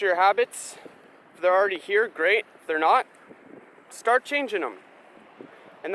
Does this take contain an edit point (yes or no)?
no